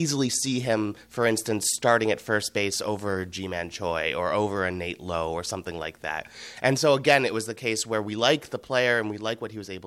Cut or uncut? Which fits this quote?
uncut